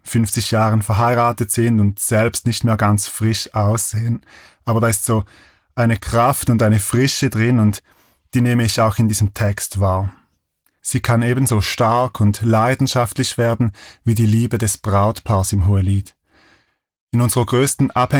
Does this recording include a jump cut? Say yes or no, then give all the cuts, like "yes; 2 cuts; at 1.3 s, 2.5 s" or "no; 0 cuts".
yes; 1 cut; at 10.8 s